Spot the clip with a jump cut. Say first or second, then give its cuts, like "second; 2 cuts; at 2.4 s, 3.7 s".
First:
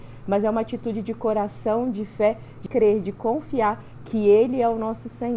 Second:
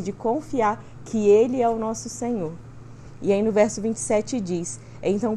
first; 1 cut; at 2.7 s